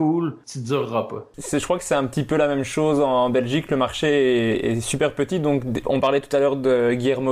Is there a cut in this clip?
no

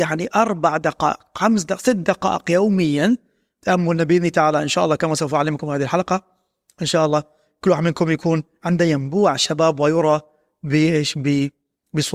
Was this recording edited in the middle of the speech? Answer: no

